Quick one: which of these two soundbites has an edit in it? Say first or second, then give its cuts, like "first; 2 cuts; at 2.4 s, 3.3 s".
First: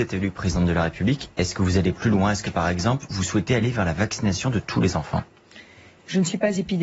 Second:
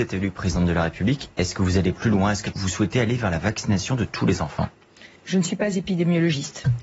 second; 2 cuts; at 2.5 s, 5.2 s